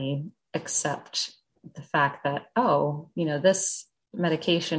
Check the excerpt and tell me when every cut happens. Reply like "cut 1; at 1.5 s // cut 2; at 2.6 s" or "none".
none